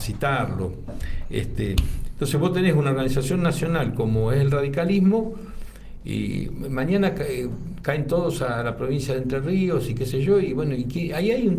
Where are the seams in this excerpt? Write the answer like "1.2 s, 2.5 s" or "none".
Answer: none

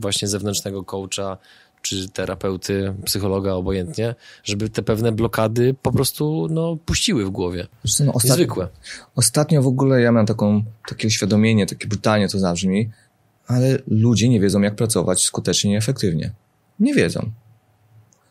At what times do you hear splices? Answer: none

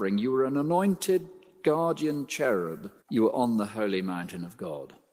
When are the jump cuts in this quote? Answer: 3.0 s

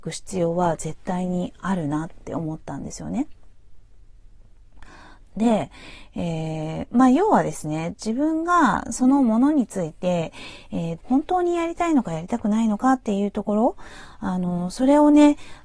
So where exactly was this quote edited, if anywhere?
5.2 s, 11.0 s

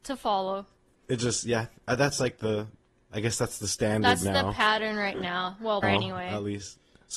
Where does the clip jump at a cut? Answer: 5.8 s

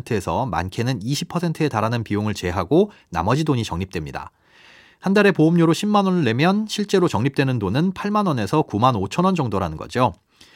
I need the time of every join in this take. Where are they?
none

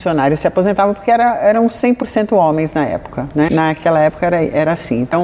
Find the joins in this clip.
3.5 s

